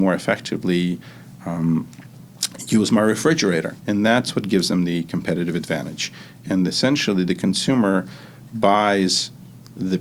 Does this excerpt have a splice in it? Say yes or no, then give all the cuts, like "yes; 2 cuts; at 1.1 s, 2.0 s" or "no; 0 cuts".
yes; 1 cut; at 3.8 s